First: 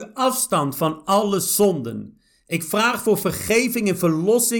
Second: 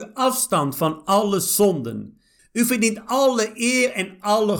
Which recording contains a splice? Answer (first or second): second